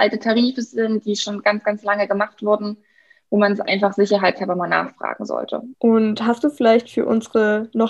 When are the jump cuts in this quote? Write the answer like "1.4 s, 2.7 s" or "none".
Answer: 5.7 s